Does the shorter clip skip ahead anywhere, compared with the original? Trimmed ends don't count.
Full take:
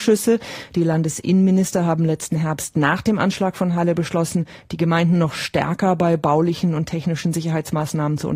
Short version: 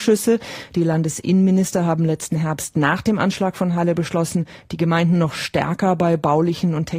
no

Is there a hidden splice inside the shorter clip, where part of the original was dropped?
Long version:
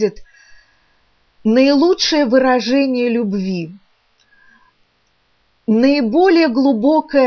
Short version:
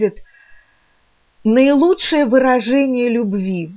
no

